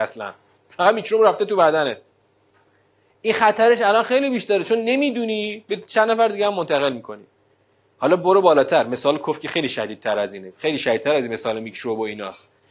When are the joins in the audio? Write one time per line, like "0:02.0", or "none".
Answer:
none